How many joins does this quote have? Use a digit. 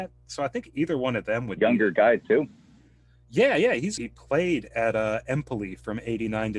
1